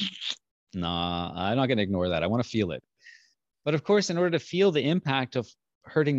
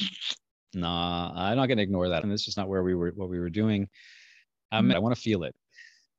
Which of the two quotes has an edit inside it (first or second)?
second